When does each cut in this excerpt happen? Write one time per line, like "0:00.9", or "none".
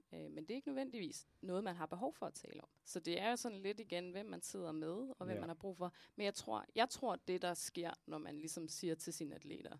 0:02.8